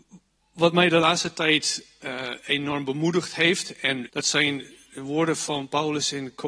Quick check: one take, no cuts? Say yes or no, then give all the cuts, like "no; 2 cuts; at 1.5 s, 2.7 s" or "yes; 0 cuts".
no; 1 cut; at 4.1 s